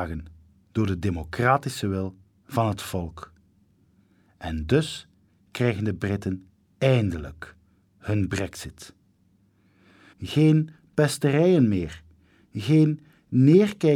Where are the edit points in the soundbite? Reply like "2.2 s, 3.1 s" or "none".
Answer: 10.1 s

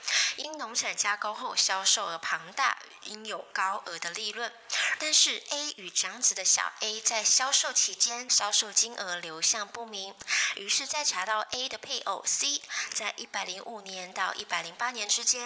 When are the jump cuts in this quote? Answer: 8.3 s

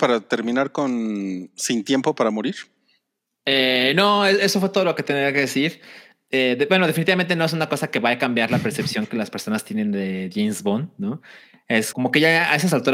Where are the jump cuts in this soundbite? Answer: 11.9 s

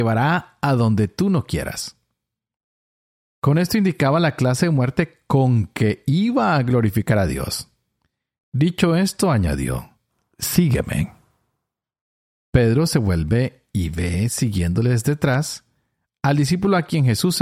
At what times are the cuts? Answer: none

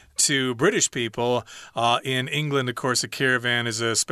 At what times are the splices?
none

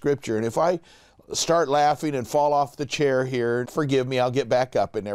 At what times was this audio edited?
3.6 s

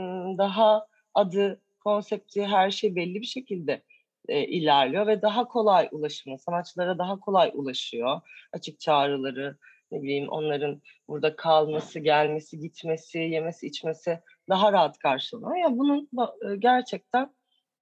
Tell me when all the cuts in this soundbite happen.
none

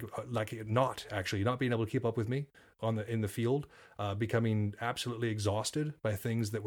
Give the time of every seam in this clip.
none

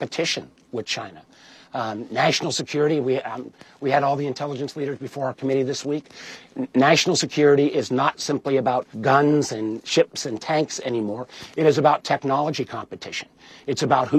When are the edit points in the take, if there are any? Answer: 8.9 s

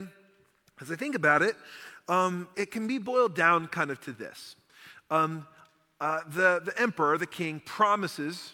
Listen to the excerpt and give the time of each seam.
2.5 s

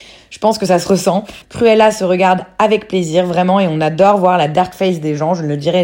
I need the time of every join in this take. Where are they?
1.4 s

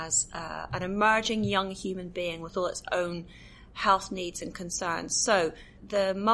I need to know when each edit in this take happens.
none

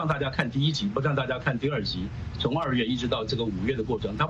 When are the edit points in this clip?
2.3 s

